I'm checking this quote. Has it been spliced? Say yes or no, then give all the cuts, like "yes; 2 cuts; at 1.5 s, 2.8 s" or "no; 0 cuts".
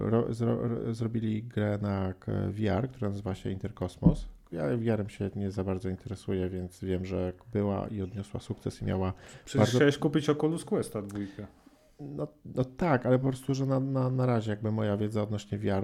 no; 0 cuts